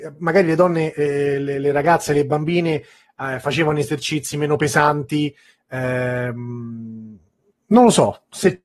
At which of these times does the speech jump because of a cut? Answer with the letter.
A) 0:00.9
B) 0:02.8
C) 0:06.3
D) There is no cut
D